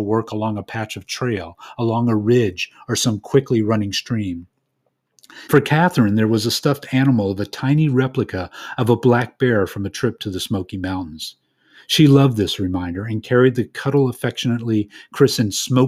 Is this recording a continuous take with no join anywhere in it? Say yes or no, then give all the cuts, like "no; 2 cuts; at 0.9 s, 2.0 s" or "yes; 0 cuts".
no; 1 cut; at 5.5 s